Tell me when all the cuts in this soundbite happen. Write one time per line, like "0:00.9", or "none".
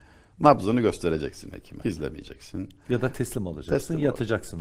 0:01.8